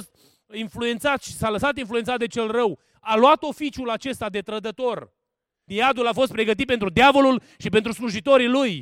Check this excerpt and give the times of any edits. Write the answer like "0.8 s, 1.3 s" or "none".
5.7 s